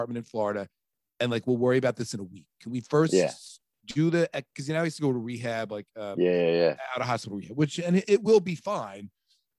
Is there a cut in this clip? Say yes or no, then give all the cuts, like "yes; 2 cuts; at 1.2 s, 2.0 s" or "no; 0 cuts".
no; 0 cuts